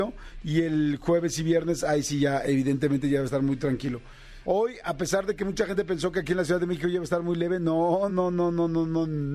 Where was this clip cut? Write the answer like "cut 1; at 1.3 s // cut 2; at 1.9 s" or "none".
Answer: cut 1; at 4.4 s // cut 2; at 8.1 s